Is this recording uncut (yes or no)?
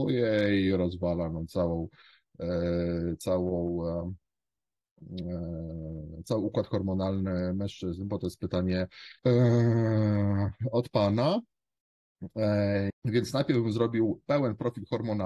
no